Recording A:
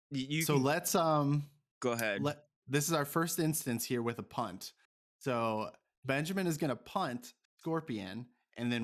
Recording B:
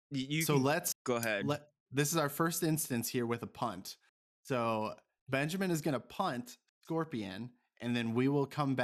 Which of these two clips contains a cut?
B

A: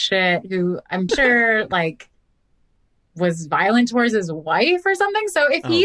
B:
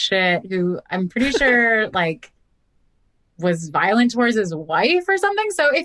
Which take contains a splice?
A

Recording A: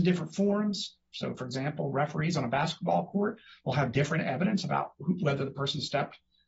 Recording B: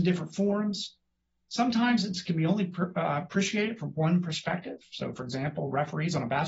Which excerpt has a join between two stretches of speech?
A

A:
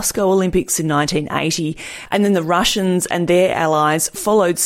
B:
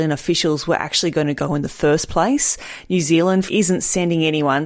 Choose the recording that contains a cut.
B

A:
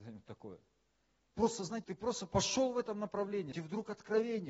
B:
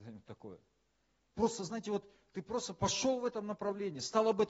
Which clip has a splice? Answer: A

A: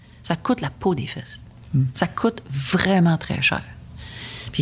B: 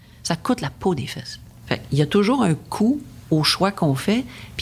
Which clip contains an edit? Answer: B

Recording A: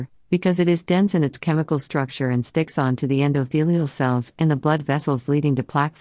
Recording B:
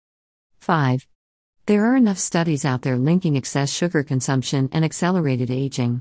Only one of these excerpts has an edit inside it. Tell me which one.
B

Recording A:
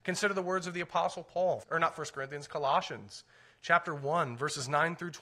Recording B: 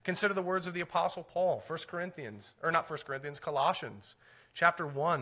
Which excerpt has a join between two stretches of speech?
A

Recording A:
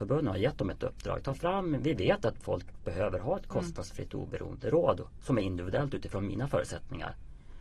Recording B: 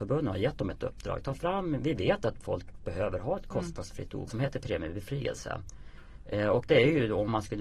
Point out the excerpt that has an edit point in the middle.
B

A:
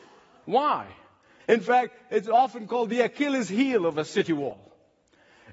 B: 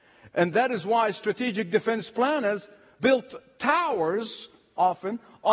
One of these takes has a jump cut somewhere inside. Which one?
A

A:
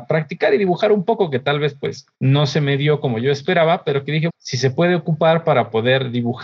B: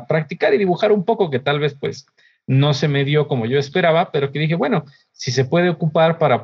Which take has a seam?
A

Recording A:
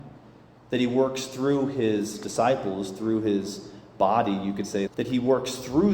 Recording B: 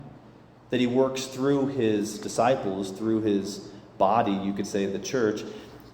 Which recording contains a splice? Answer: A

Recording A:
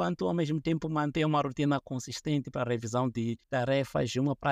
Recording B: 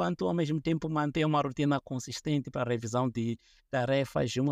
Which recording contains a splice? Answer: A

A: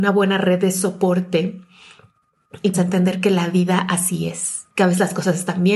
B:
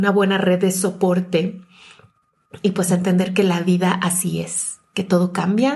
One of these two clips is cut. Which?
A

